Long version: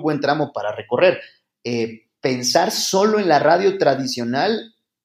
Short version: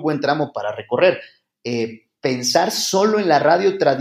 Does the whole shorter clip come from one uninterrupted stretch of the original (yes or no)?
yes